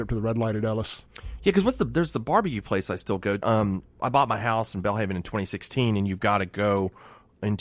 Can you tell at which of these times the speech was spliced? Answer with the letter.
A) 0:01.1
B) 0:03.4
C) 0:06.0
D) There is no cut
B